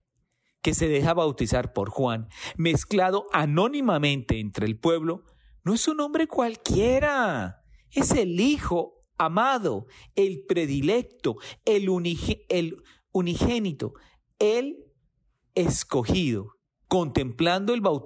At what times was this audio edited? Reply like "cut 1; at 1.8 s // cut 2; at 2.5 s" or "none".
cut 1; at 16.9 s

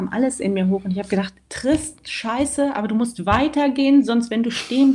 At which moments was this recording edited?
cut 1; at 1.4 s

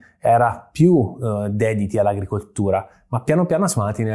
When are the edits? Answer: none

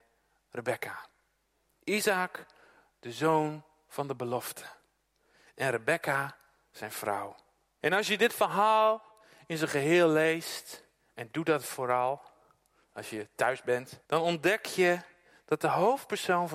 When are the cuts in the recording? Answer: cut 1; at 7.8 s // cut 2; at 14.0 s

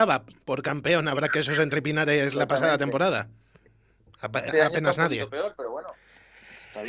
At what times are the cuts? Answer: cut 1; at 4.5 s

